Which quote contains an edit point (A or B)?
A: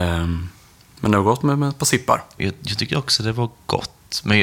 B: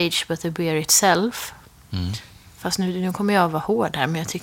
A